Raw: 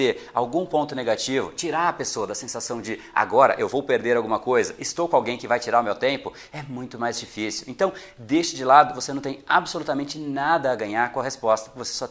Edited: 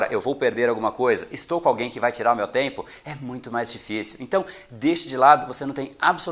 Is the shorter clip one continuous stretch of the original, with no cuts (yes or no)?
yes